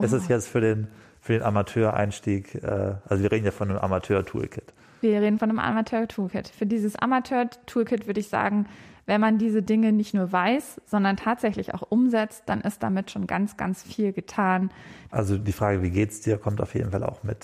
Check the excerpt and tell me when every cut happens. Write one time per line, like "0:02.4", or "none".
0:15.1